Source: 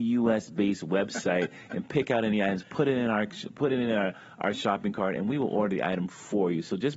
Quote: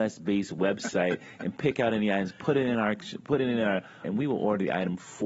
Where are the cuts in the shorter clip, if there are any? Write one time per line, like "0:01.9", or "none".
0:04.0

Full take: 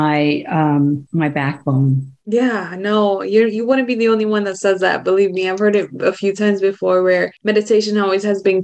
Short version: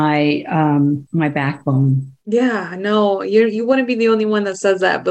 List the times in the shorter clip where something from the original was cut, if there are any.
none

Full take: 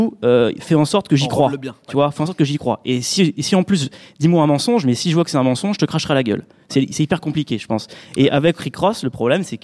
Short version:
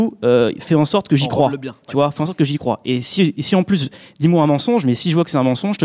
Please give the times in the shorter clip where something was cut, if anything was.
none

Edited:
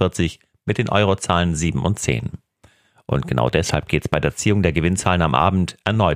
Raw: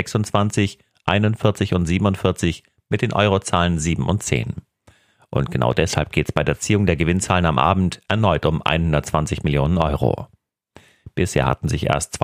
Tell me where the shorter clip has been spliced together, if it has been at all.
none

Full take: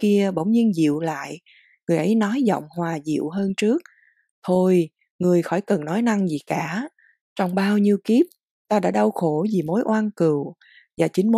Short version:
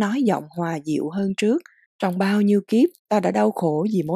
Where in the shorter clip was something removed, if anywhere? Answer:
0:01.8
0:03.0

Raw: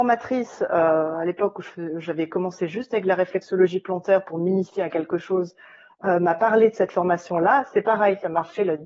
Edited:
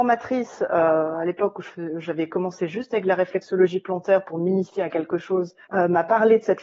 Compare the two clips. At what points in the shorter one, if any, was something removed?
0:05.6

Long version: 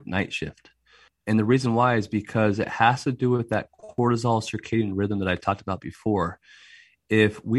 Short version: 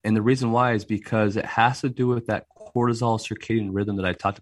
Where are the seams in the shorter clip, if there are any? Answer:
none

